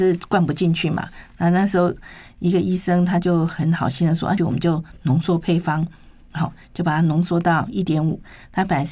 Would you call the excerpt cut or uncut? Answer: cut